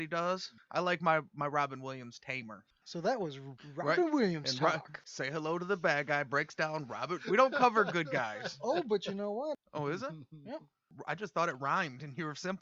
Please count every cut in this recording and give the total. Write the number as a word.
two